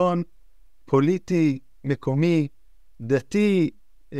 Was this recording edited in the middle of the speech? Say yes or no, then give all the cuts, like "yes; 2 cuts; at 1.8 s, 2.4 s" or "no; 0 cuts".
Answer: no; 0 cuts